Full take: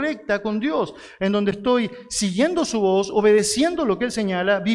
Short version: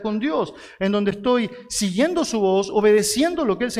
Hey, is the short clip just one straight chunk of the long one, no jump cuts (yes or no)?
yes